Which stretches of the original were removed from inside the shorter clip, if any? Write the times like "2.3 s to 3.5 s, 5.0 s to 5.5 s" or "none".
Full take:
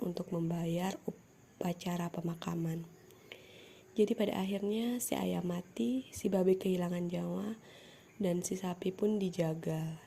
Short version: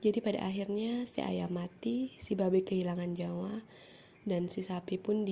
none

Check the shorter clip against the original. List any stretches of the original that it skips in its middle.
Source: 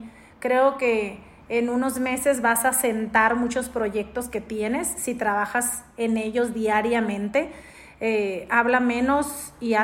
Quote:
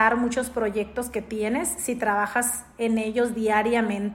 none

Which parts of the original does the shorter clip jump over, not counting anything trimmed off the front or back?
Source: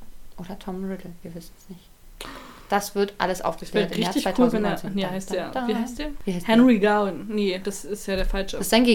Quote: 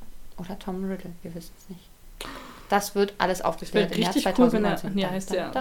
none

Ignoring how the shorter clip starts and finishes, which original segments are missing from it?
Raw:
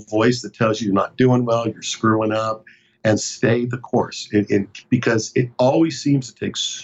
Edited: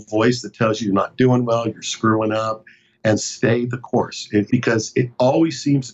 4.5 s to 4.9 s

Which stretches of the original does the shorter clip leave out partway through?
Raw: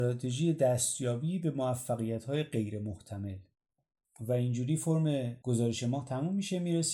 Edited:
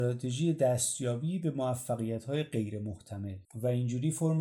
3.4 s to 4.1 s

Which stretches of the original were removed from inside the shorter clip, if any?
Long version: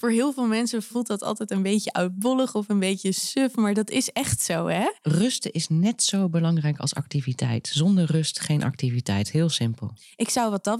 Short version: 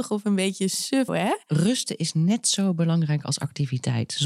3.5 s to 4.6 s

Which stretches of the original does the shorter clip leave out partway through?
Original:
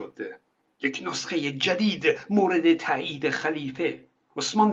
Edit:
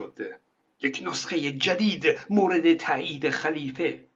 none

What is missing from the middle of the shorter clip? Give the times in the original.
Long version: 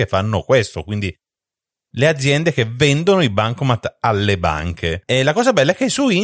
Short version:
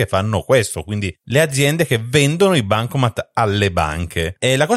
1.2 s to 1.9 s

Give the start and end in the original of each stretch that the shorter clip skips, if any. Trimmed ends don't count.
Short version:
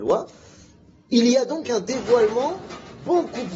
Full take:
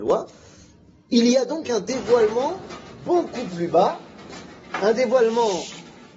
none

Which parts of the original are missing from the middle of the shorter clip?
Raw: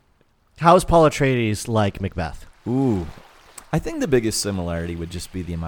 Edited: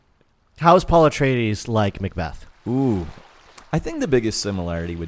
none

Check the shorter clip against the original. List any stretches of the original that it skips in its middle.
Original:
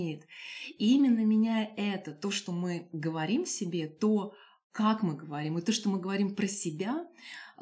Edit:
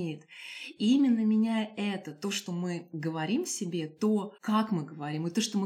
4.4 s to 4.7 s

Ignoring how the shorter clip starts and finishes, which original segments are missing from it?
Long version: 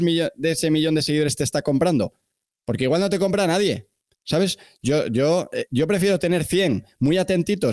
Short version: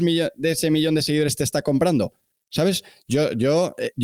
2.4 s to 4.2 s

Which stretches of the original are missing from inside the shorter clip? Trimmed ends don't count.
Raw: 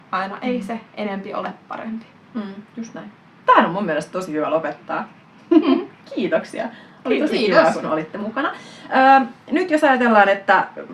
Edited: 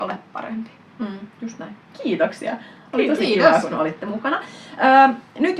3.2 s to 6.0 s

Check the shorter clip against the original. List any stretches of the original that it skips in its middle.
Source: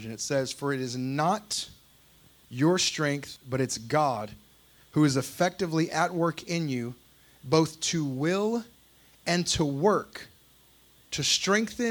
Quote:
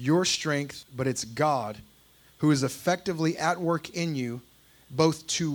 none

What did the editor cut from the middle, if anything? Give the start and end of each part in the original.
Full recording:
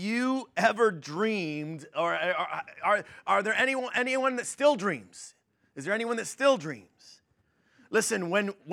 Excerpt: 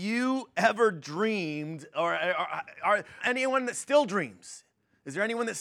3.2 s to 3.9 s

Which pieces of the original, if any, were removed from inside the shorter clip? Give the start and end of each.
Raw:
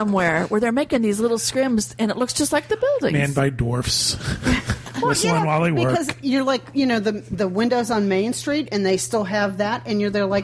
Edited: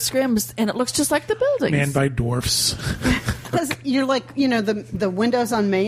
4.9 s to 5.9 s

